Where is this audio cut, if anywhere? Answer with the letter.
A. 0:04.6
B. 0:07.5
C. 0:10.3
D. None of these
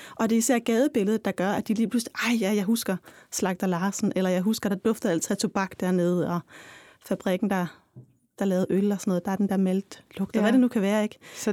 D